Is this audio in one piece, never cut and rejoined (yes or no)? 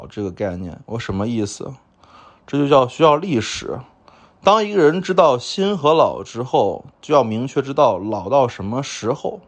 yes